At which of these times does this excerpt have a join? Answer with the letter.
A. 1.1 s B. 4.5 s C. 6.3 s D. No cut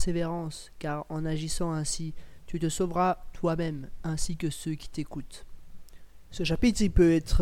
C